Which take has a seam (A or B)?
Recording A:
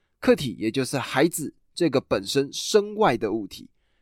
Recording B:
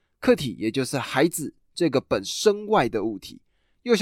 B